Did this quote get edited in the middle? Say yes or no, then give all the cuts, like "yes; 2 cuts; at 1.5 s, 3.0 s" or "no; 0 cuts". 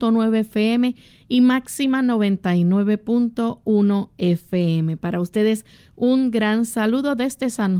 no; 0 cuts